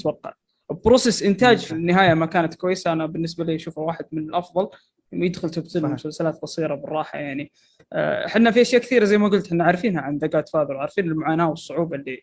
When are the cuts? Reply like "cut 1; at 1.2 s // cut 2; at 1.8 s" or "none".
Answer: cut 1; at 1.7 s